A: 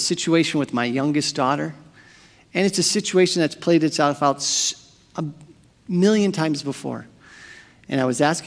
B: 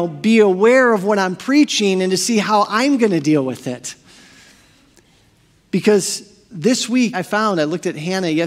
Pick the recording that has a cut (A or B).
B